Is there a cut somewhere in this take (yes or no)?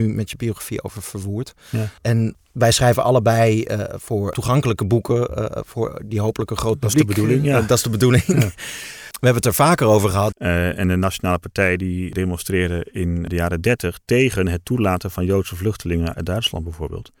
yes